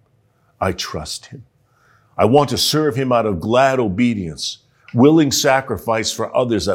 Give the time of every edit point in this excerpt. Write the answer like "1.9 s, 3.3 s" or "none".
none